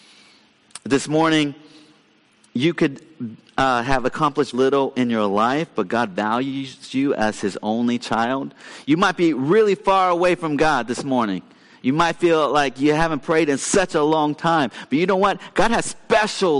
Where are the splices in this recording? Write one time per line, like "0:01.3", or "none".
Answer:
0:04.5